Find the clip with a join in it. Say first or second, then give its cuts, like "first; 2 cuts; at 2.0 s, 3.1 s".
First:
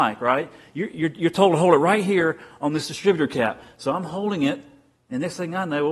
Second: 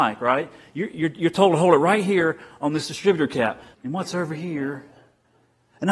second; 1 cut; at 3.7 s